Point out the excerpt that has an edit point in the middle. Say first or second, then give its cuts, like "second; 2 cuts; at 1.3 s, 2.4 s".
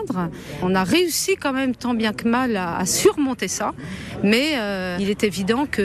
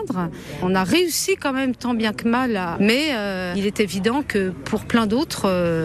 second; 1 cut; at 2.7 s